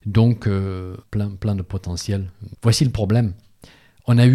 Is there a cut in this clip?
yes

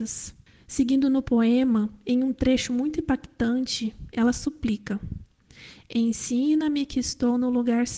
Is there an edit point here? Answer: no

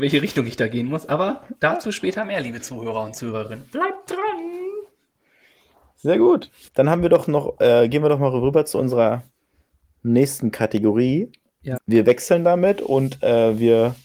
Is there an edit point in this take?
yes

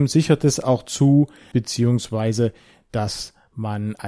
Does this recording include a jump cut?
yes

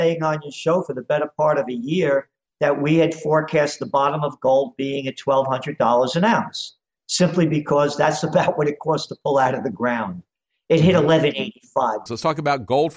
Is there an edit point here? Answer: yes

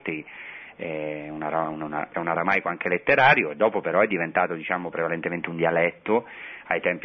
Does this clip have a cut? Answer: yes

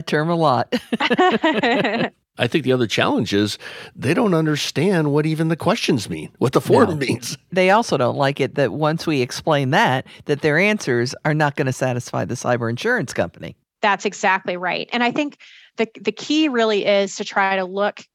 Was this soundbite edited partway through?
no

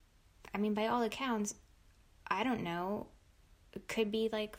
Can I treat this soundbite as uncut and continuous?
yes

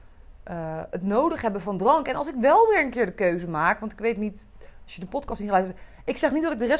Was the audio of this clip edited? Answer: no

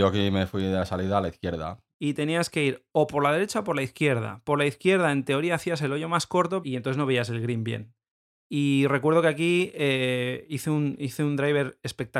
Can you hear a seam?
yes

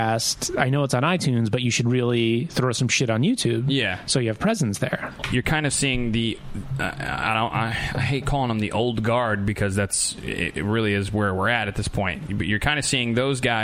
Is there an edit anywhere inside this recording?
no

